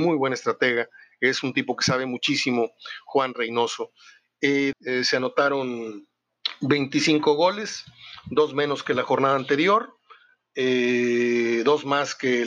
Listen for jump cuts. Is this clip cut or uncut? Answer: cut